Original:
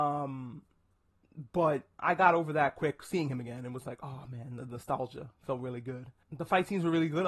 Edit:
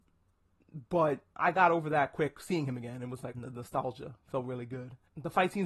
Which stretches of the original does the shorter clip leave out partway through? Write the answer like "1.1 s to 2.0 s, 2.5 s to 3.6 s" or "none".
4.0 s to 4.5 s